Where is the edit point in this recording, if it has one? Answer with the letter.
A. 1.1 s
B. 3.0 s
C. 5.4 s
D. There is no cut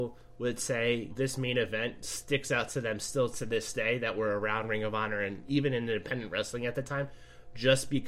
A